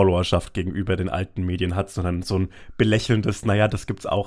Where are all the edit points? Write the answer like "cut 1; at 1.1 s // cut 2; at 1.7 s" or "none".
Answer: none